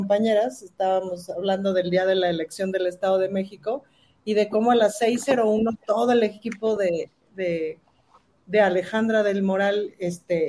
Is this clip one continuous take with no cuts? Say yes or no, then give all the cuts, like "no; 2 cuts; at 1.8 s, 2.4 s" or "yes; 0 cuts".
yes; 0 cuts